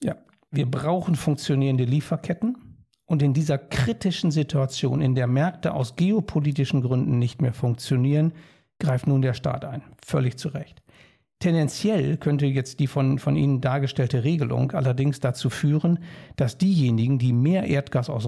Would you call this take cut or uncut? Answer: uncut